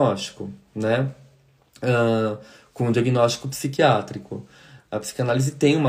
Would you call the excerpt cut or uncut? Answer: uncut